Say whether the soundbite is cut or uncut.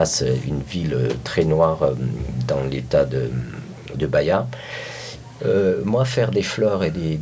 cut